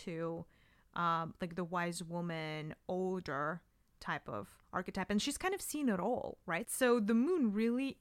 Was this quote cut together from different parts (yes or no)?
yes